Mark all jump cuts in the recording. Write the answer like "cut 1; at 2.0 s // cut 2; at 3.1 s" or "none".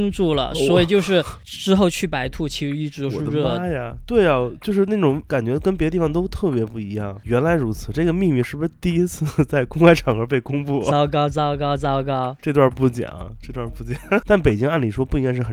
cut 1; at 14.2 s